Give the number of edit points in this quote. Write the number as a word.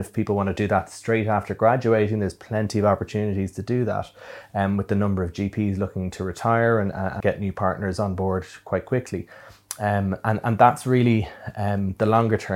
one